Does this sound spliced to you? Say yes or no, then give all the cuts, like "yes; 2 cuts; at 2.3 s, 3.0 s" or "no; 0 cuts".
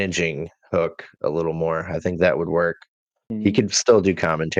no; 0 cuts